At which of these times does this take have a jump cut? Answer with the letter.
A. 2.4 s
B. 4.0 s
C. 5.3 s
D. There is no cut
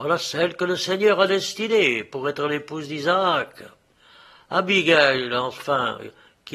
D